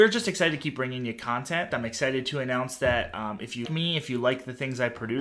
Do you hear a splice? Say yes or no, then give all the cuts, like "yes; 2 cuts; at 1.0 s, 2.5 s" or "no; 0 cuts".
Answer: yes; 2 cuts; at 1.7 s, 3.6 s